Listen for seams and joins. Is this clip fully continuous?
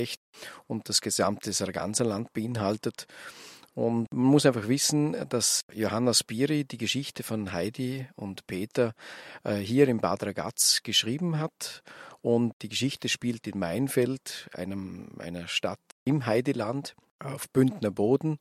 yes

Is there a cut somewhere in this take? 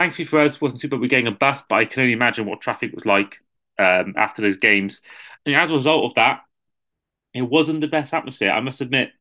yes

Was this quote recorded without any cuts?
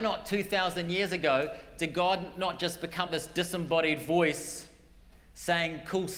no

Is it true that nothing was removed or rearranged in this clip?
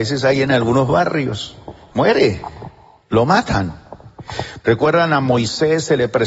no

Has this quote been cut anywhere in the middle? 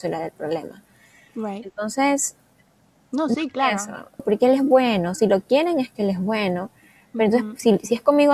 yes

